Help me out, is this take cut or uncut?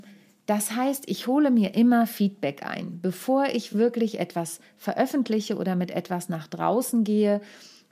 uncut